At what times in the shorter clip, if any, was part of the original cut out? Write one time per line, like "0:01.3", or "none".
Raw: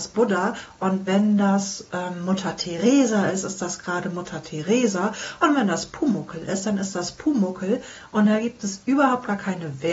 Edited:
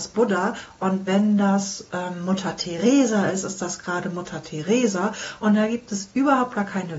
0:05.4